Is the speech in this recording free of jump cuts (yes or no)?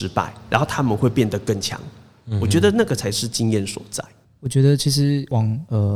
yes